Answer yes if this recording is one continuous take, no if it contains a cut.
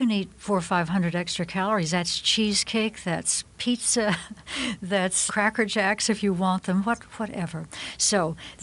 no